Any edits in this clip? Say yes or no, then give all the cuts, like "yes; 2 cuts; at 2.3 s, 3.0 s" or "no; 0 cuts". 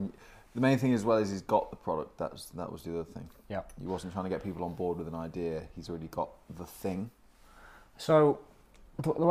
no; 0 cuts